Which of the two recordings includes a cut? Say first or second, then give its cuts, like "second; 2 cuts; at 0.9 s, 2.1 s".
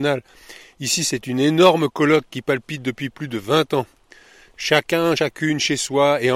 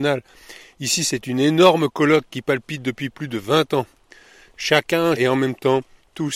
second; 1 cut; at 5.2 s